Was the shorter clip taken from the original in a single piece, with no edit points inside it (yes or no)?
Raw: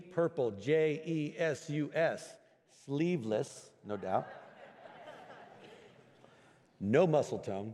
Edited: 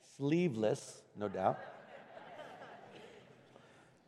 yes